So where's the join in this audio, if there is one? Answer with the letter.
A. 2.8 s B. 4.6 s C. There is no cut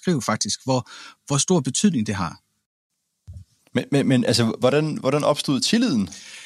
C